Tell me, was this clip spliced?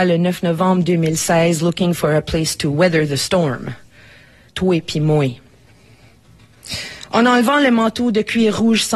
yes; 1 cut; at 4.5 s

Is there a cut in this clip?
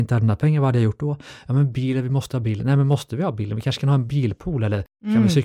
no; 0 cuts

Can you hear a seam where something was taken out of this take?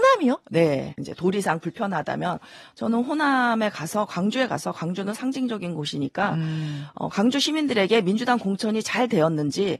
yes; 1 cut; at 1.0 s

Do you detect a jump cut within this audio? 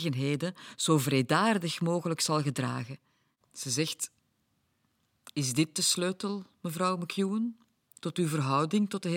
yes; 1 cut; at 3.4 s

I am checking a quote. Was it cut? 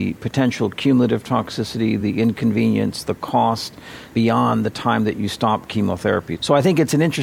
no; 0 cuts

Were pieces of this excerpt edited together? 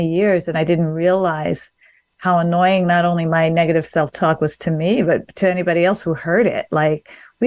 no; 0 cuts

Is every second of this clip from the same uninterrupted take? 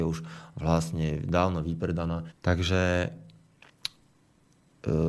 no; 1 cut; at 2.3 s

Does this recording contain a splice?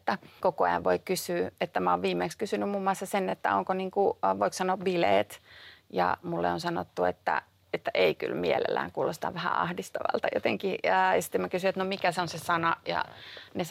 no; 0 cuts

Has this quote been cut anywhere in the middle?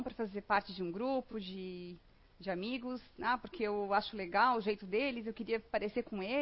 no; 0 cuts

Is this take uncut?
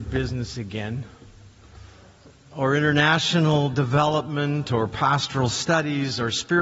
yes; 0 cuts

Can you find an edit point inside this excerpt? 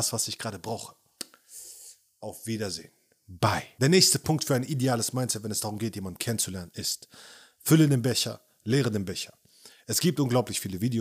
no; 0 cuts

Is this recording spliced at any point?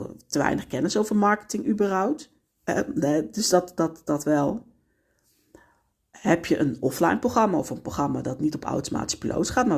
yes; 1 cut; at 2.5 s

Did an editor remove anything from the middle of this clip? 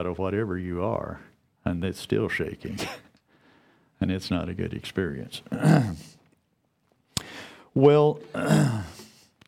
no; 0 cuts

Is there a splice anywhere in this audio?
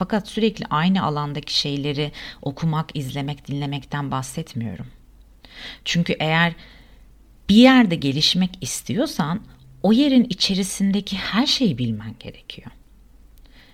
no; 0 cuts

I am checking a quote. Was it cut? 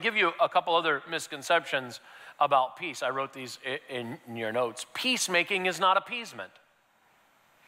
no; 0 cuts

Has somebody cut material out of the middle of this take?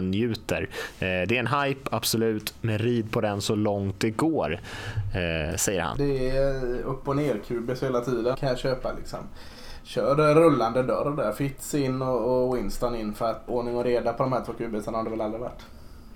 yes; 3 cuts; at 5.9 s, 8.3 s, 13.5 s

